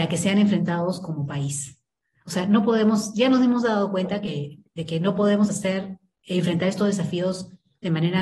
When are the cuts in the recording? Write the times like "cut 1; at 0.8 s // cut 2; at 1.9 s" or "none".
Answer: none